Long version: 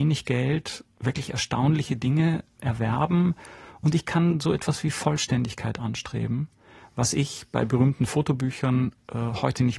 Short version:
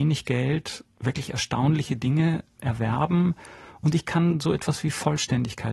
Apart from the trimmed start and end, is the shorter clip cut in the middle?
no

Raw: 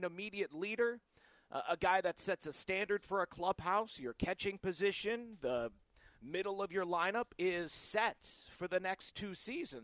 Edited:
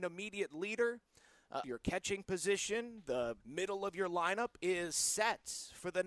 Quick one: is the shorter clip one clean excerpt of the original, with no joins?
no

